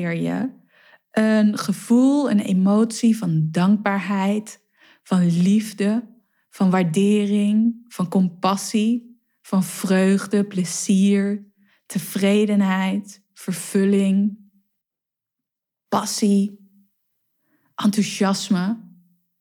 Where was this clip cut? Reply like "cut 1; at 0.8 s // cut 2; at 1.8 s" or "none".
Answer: none